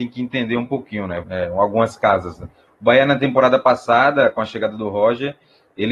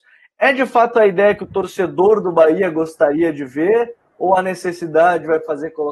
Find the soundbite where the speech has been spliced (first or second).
first